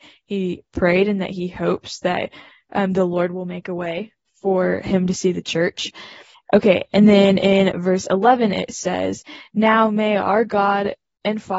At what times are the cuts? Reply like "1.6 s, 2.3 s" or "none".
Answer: 6.3 s